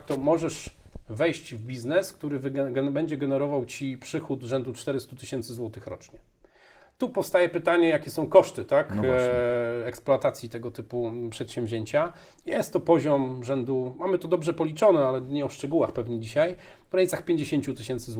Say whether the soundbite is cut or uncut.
uncut